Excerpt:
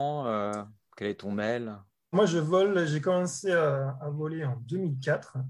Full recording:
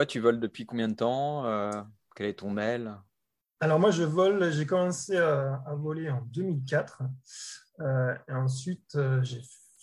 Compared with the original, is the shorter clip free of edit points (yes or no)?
no